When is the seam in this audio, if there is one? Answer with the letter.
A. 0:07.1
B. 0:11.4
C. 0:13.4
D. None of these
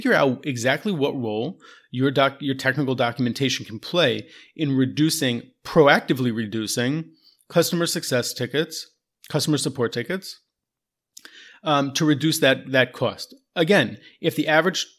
D